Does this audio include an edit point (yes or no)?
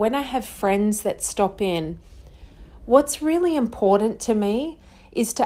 no